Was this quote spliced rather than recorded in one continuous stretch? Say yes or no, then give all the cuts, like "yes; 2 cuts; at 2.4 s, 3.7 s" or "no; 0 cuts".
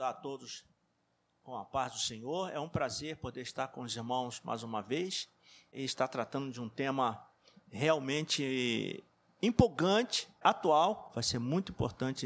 no; 0 cuts